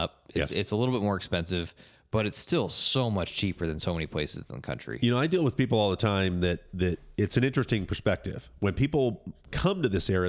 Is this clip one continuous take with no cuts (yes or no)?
yes